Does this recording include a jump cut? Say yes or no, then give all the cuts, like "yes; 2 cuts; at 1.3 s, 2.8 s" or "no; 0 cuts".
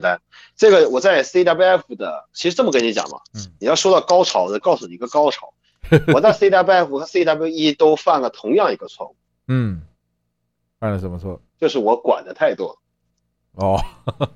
yes; 1 cut; at 4.6 s